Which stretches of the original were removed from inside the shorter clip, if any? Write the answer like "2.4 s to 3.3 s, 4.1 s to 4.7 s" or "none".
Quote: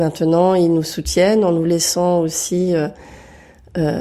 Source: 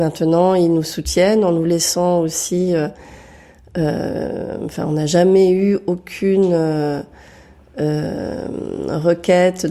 none

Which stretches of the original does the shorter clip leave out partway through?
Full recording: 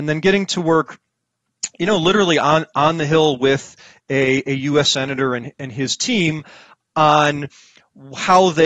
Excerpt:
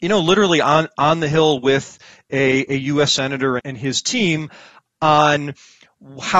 5.4 s to 5.5 s

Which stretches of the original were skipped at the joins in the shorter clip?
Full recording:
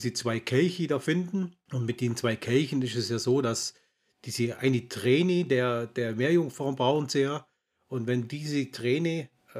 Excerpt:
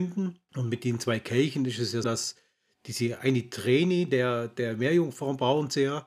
3.2 s to 3.4 s

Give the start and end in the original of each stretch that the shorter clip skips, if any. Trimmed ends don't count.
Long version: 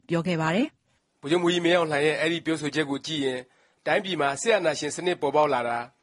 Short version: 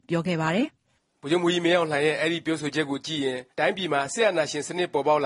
3.5 s to 3.8 s

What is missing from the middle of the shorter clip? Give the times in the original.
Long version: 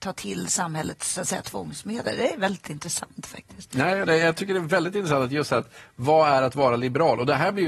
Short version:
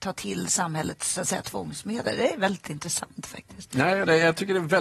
none

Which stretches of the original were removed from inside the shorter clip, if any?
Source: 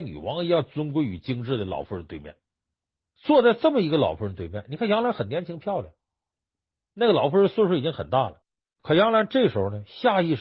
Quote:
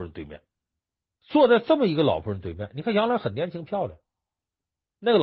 none

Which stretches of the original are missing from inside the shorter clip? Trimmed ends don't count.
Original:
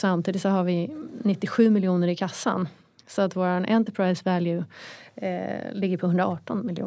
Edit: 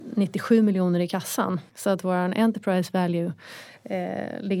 2.8 s to 3.0 s

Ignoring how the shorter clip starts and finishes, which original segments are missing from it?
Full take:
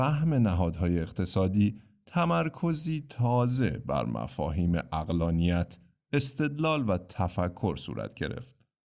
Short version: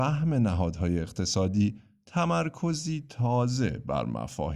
none

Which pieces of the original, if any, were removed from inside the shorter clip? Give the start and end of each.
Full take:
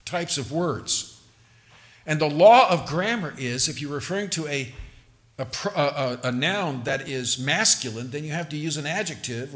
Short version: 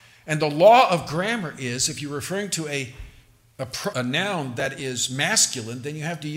5.7 s to 6.2 s

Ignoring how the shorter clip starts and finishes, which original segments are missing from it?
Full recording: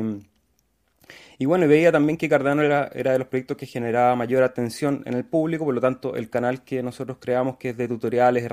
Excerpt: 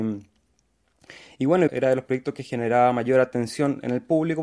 1.7 s to 2.9 s

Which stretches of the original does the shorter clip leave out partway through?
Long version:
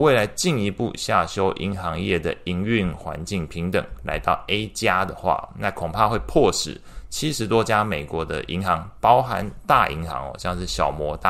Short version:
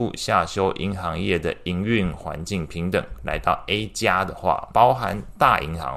5.5 s to 9.0 s

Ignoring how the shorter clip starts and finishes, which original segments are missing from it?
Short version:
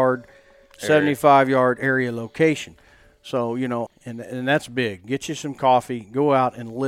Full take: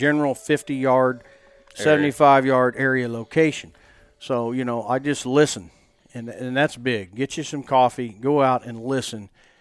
4.8 s to 6.0 s

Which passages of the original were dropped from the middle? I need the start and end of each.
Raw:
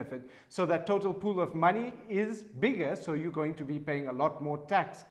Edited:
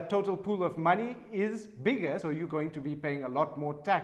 3.0 s to 3.1 s

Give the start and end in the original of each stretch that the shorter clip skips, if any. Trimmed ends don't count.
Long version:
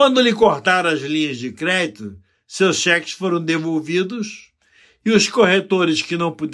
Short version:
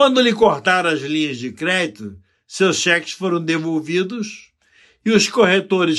none

